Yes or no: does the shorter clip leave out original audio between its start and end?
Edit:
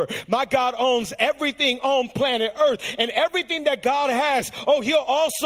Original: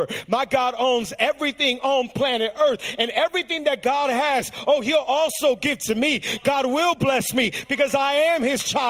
no